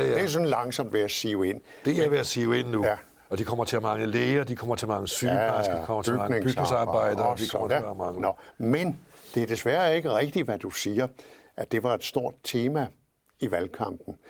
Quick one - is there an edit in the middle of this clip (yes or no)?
yes